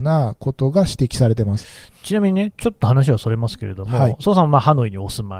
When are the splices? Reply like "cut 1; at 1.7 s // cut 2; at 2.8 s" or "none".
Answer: none